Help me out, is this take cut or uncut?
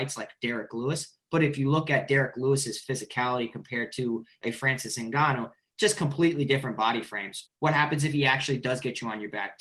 cut